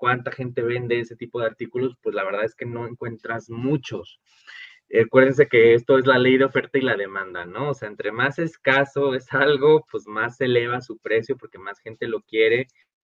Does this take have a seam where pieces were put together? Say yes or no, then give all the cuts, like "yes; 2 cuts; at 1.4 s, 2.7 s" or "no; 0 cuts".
no; 0 cuts